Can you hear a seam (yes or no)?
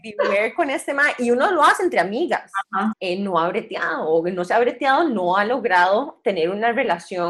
yes